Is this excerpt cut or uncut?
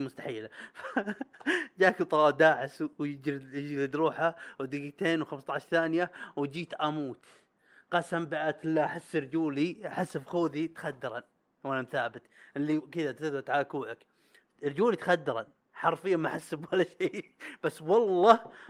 uncut